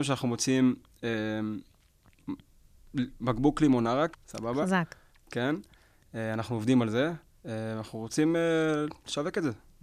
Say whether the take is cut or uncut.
cut